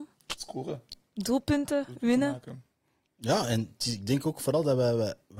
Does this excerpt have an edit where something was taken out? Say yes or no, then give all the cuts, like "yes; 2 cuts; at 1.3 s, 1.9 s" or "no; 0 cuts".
no; 0 cuts